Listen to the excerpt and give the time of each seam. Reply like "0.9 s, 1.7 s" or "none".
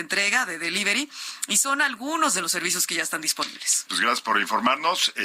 3.9 s